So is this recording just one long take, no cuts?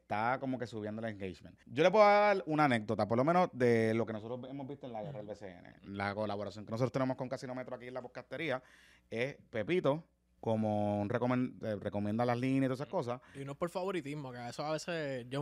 no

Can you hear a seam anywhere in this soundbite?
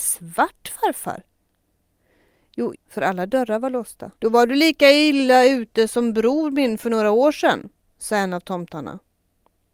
yes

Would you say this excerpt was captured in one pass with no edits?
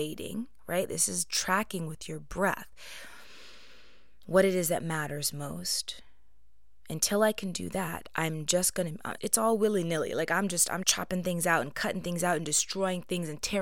no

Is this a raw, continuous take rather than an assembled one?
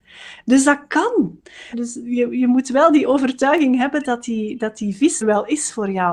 no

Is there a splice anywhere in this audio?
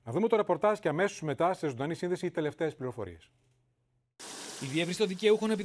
no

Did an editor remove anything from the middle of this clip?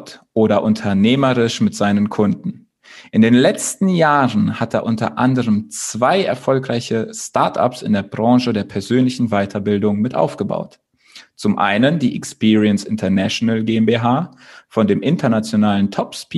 no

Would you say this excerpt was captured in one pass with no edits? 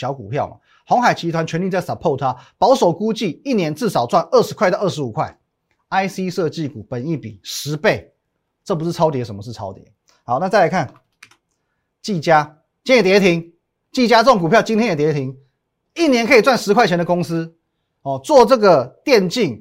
yes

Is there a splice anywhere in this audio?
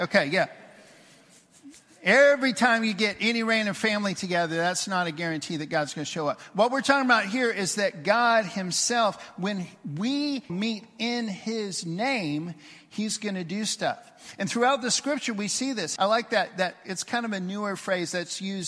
yes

